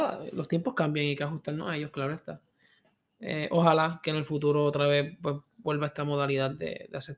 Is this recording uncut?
yes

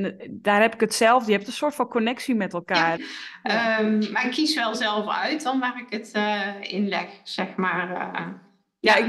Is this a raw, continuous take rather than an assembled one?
no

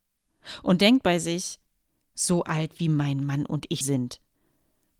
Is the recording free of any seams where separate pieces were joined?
no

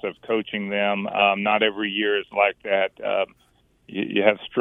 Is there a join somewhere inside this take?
no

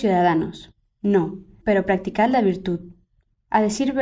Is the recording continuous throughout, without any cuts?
no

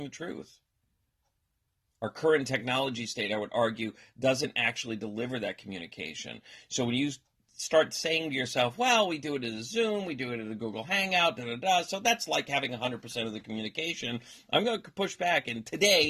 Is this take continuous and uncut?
yes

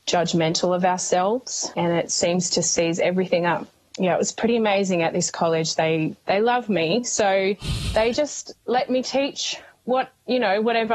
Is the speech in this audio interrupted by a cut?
no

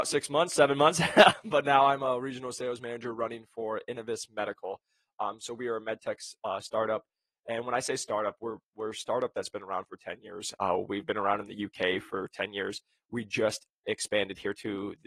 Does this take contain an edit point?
no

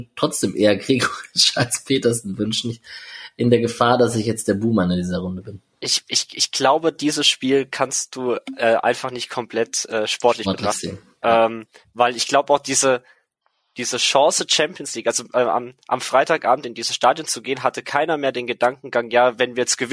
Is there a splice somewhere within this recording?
no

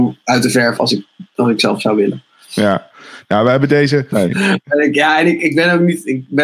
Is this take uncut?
no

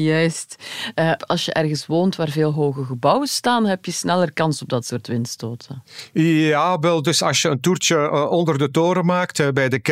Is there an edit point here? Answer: yes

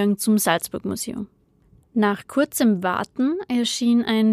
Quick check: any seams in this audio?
no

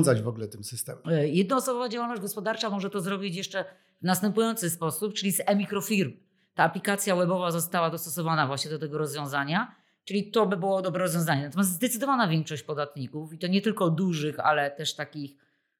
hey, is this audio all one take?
yes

